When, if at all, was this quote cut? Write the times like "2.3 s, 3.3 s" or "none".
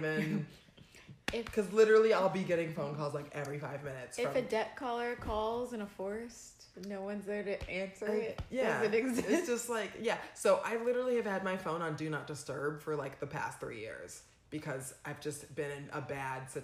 none